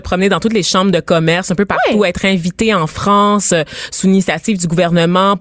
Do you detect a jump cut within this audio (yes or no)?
no